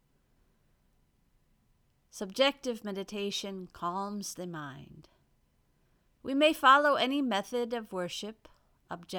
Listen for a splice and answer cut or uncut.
uncut